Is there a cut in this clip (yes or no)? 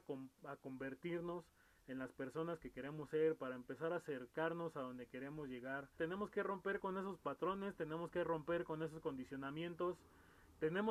yes